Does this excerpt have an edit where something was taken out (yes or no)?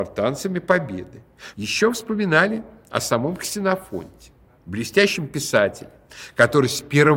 yes